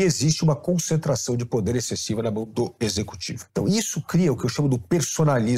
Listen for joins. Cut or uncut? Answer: cut